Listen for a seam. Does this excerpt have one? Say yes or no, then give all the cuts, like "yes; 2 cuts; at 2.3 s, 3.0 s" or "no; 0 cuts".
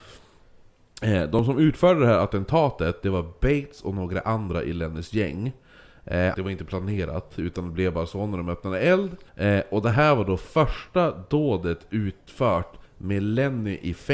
yes; 3 cuts; at 6.3 s, 9.3 s, 12.9 s